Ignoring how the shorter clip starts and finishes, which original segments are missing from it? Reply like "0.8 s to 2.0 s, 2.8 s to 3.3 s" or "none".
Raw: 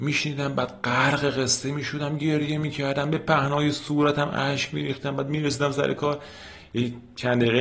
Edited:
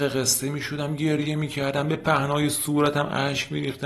none